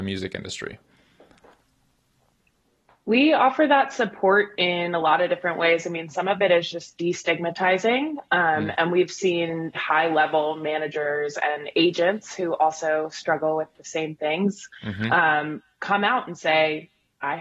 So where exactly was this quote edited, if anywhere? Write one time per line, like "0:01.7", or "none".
0:09.7